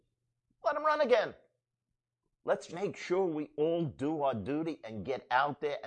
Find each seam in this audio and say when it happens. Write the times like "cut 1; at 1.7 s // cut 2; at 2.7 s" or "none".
cut 1; at 2.7 s